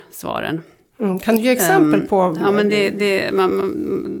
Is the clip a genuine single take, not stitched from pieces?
yes; 0 cuts

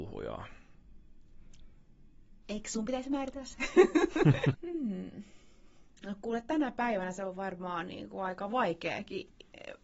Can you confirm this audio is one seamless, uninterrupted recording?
no; 1 cut; at 4.5 s

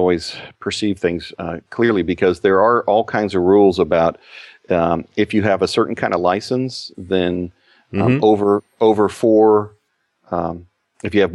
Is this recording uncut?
yes; 0 cuts

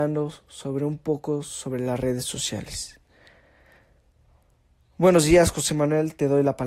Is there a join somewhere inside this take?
no; 0 cuts

